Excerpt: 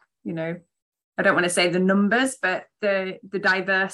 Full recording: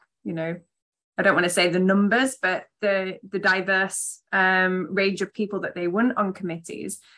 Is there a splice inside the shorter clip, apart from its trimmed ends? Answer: no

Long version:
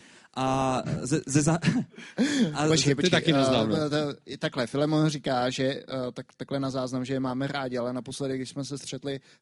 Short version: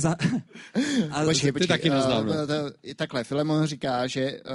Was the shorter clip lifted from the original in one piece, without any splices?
yes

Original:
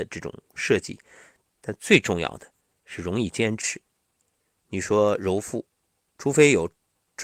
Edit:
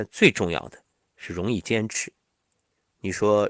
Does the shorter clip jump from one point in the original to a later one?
no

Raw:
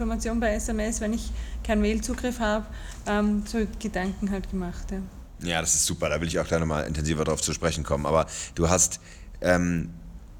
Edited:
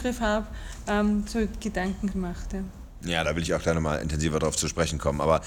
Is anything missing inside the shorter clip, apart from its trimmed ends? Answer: yes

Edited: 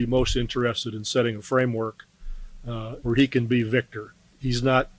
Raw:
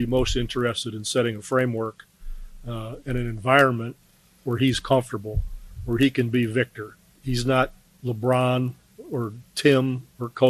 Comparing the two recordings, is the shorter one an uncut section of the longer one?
no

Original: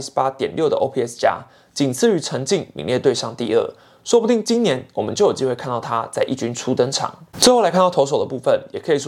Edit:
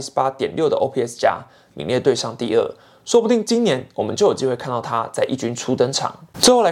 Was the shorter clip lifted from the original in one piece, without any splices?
no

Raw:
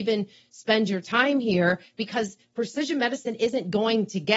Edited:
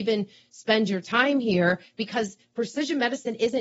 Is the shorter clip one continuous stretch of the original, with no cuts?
yes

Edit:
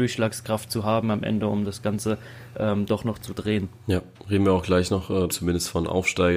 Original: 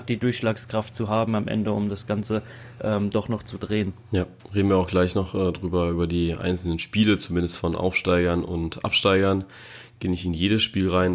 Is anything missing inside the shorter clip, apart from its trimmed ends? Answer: yes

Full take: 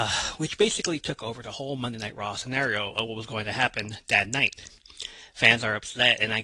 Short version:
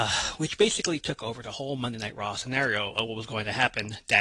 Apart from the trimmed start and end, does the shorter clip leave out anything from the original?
no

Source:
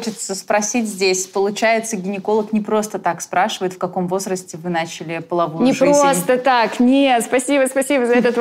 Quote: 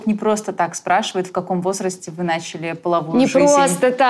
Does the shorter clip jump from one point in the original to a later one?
no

